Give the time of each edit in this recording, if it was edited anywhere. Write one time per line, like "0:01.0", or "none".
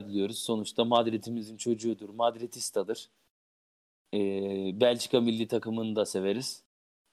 none